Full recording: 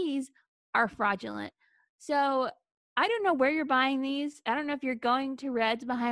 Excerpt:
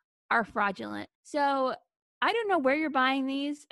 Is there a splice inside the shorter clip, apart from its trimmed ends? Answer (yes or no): yes